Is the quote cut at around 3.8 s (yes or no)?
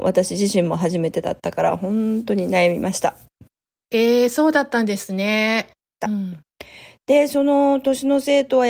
no